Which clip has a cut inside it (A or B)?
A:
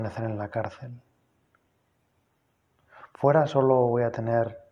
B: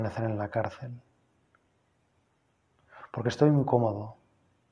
A